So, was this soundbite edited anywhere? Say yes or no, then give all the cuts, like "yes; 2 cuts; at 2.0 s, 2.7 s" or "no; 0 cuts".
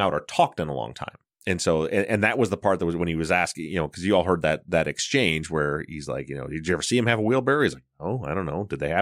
yes; 1 cut; at 1.3 s